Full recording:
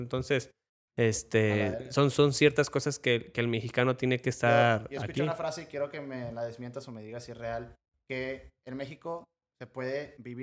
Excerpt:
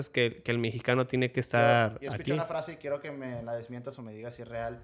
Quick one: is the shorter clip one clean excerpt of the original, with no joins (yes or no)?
yes